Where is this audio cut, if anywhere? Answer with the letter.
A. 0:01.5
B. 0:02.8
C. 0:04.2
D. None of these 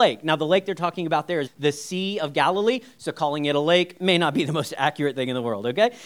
A